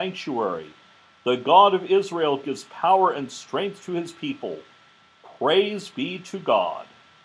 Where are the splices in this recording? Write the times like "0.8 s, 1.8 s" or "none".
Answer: none